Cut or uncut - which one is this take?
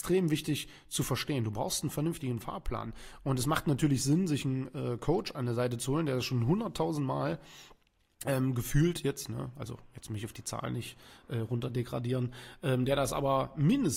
uncut